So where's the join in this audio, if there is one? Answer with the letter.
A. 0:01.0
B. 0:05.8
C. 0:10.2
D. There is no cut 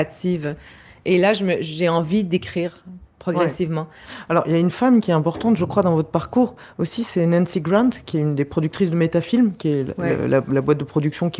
D